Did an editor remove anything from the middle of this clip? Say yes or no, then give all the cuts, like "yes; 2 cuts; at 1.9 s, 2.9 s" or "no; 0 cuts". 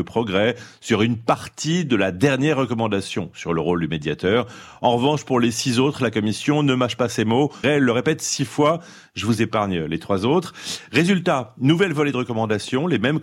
yes; 1 cut; at 7.6 s